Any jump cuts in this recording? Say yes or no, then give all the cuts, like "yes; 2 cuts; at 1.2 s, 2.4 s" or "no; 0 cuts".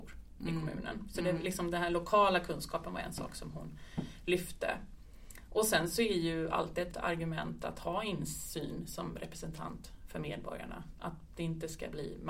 yes; 1 cut; at 6.9 s